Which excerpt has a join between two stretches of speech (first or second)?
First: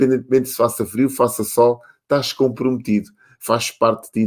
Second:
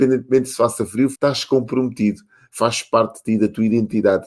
second